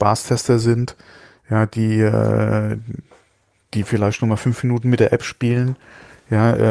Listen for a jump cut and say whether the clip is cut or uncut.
uncut